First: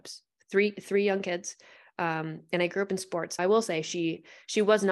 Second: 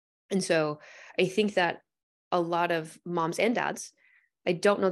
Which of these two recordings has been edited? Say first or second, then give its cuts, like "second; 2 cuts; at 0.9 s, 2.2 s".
first; 1 cut; at 3.4 s